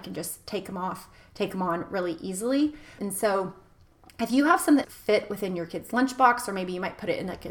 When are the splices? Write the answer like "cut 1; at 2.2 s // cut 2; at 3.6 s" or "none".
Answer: cut 1; at 3.0 s // cut 2; at 4.8 s